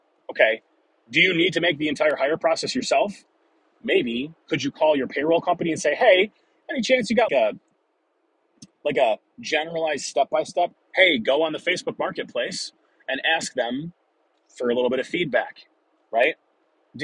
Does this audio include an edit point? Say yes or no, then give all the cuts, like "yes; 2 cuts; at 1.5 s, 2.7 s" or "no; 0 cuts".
yes; 2 cuts; at 7.3 s, 10.8 s